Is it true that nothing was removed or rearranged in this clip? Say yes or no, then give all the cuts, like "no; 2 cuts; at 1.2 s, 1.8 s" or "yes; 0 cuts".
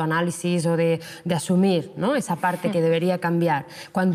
yes; 0 cuts